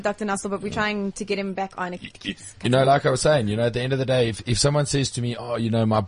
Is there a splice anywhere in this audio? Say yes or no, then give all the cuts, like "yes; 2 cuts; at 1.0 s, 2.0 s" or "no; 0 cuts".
no; 0 cuts